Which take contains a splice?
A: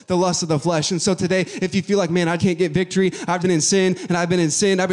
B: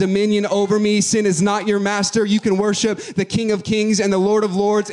A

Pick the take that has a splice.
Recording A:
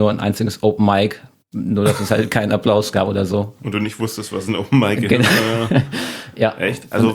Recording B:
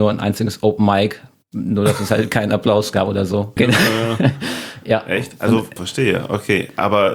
B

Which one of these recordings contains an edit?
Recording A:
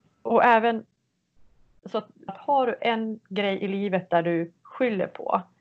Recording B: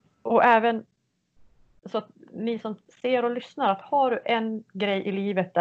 A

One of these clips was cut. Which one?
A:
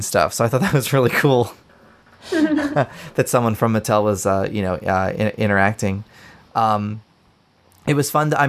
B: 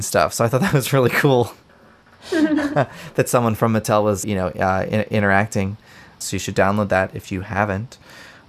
B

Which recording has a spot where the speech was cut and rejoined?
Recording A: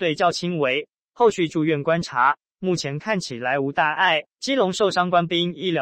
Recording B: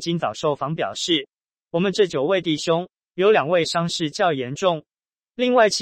A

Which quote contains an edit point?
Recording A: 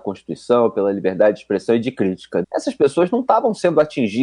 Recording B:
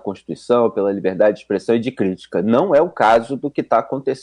A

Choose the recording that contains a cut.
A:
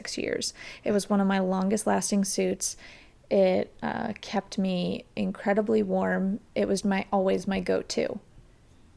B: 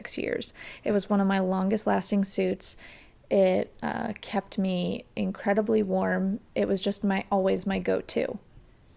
A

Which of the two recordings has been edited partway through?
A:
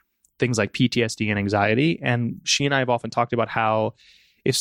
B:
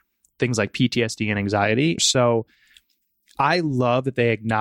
B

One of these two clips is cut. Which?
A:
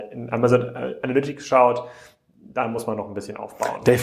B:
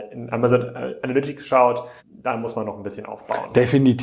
B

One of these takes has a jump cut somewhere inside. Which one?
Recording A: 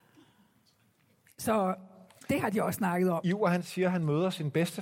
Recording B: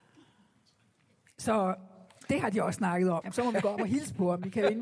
B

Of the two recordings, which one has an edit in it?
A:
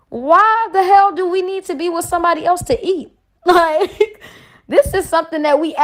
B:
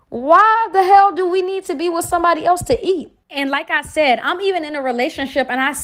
B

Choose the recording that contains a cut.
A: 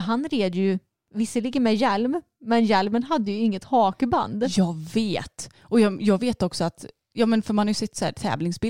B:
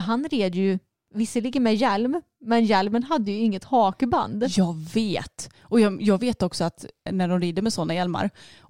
B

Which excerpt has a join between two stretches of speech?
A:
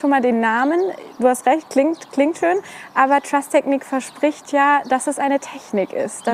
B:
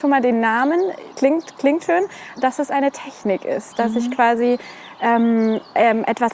B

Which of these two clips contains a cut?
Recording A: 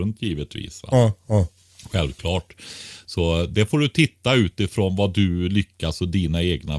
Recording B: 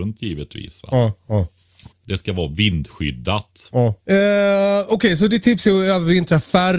B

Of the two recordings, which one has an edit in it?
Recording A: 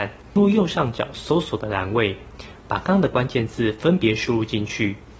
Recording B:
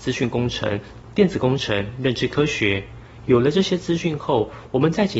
A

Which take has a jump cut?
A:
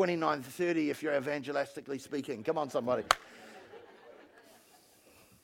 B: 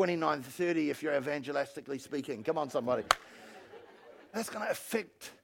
B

